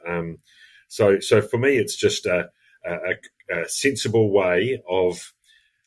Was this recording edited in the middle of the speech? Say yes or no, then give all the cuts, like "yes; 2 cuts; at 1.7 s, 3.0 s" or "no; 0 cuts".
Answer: no; 0 cuts